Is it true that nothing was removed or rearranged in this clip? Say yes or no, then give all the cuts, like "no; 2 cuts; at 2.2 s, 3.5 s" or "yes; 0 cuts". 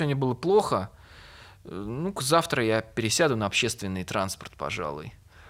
yes; 0 cuts